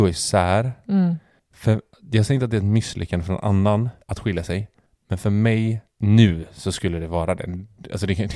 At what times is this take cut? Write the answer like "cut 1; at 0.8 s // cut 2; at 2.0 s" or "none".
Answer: cut 1; at 4.0 s // cut 2; at 5.9 s